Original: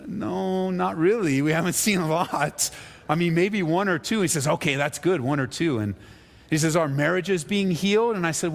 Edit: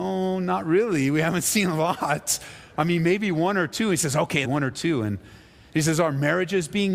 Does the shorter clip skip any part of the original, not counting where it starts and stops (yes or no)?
yes